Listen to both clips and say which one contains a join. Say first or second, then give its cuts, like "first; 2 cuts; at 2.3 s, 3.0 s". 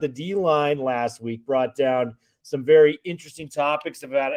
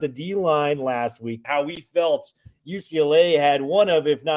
second; 1 cut; at 1.4 s